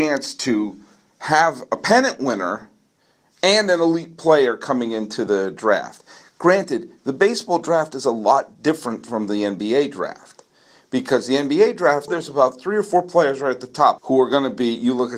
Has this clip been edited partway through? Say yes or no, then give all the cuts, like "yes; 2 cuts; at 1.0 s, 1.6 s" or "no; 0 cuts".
yes; 2 cuts; at 12.1 s, 14.0 s